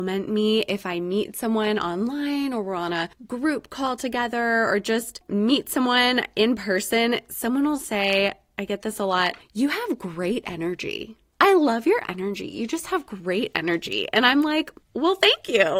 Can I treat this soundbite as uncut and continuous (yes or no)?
yes